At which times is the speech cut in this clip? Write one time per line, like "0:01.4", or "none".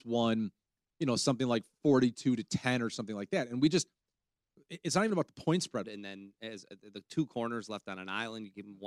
0:05.8